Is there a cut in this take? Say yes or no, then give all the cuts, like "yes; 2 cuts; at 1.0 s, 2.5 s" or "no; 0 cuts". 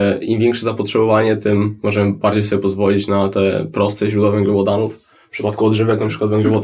no; 0 cuts